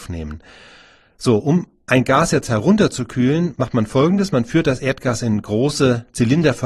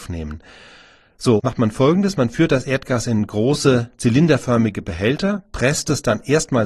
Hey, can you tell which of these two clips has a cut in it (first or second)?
second